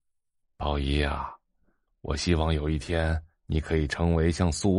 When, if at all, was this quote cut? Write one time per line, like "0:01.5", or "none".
none